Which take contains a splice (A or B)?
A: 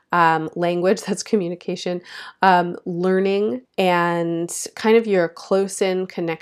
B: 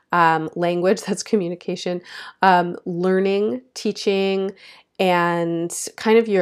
A